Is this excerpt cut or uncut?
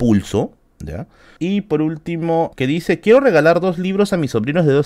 cut